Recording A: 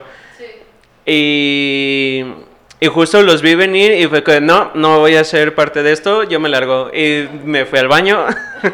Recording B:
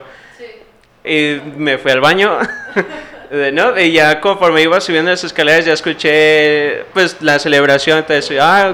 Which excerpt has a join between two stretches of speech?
B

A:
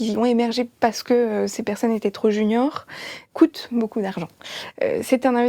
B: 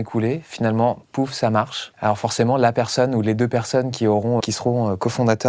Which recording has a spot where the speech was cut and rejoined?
B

